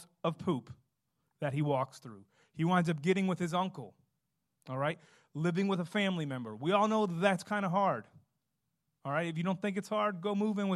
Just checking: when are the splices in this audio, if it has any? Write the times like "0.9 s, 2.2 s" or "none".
none